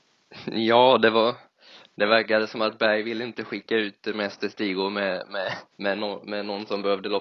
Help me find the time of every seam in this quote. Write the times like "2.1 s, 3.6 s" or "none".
5.7 s